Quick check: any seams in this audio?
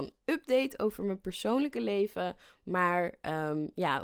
no; 0 cuts

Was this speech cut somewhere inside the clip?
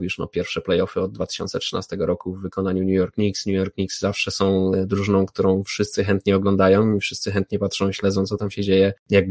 no; 0 cuts

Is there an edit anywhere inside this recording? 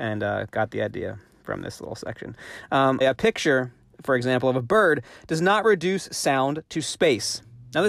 yes; 1 cut; at 3.0 s

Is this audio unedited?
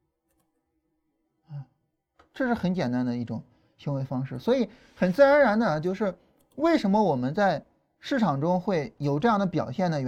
yes; 0 cuts

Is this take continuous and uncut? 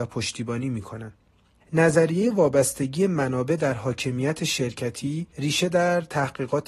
no; 2 cuts; at 1.6 s, 5.3 s

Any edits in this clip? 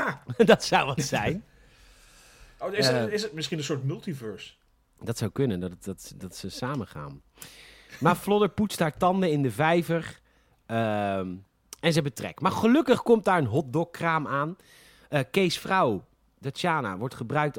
no; 0 cuts

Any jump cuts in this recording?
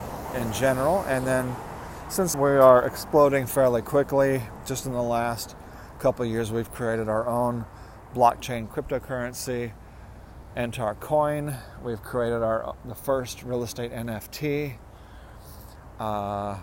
yes; 1 cut; at 2.3 s

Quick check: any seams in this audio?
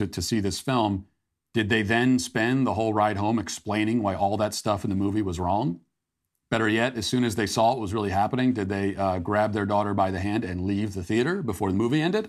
no; 0 cuts

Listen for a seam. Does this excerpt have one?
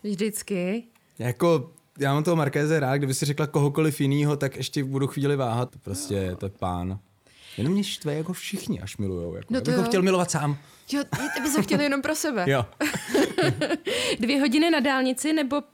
yes; 1 cut; at 5.7 s

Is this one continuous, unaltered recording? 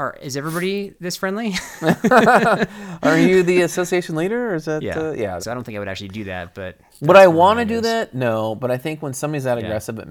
no; 1 cut; at 5.4 s

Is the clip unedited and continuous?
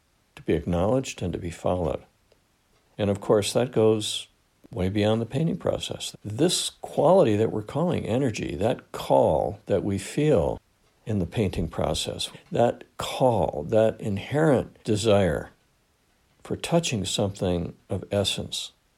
no; 3 cuts; at 6.1 s, 12.3 s, 14.8 s

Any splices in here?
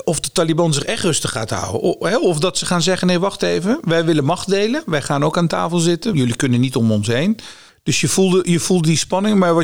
yes; 2 cuts; at 6.1 s, 7.7 s

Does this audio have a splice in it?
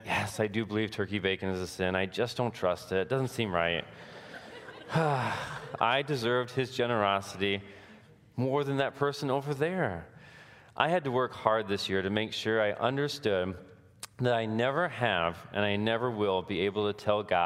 no; 0 cuts

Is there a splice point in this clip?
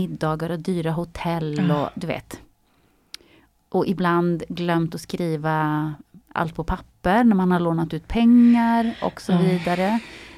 no; 0 cuts

